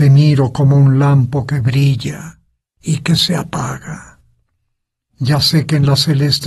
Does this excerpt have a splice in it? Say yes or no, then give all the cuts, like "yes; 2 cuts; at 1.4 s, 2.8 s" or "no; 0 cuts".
yes; 1 cut; at 5.1 s